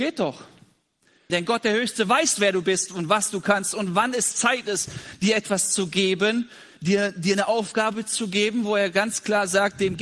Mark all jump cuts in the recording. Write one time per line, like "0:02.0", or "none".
0:01.3

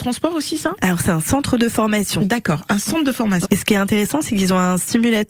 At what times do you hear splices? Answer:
0:03.4

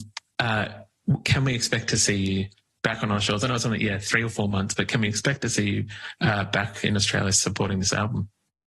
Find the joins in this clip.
none

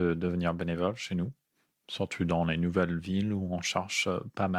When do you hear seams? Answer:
none

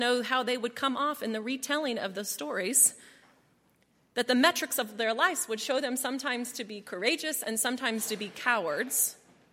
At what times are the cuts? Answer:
none

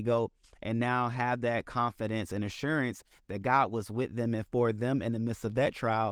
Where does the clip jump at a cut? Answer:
none

